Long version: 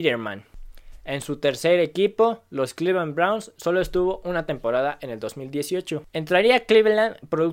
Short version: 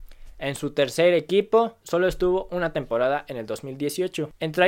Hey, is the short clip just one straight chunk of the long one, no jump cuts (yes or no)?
no